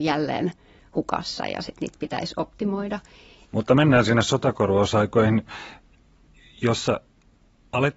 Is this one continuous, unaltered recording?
no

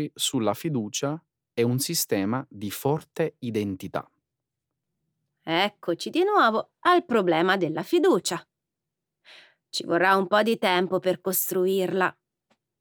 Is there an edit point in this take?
no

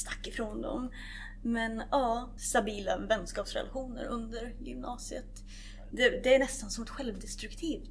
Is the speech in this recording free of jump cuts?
no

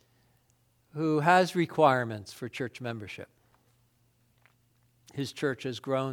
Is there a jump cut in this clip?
no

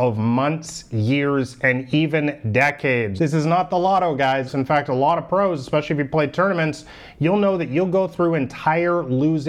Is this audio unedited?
no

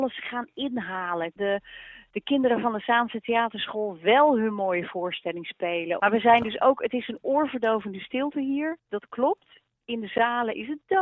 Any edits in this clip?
yes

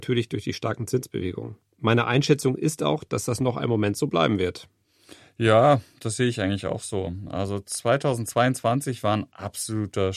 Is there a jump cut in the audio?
no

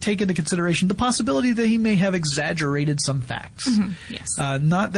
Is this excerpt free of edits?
yes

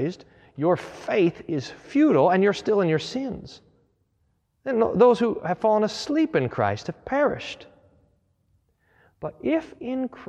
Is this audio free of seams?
yes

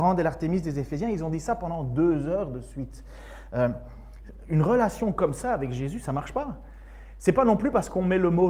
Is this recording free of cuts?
yes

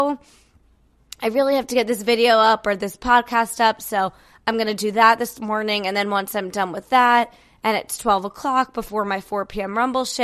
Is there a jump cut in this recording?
no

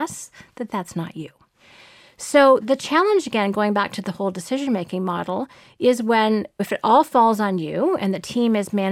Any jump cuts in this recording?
no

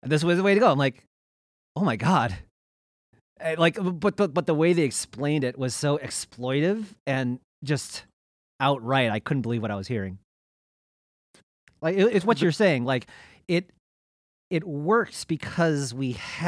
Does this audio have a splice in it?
no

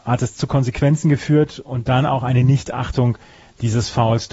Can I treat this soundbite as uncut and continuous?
yes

